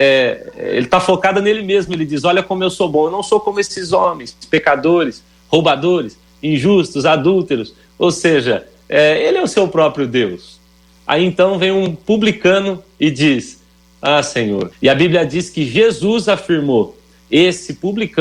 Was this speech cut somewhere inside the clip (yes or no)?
yes